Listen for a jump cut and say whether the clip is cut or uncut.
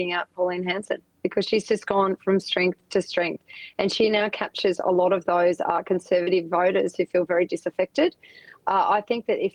uncut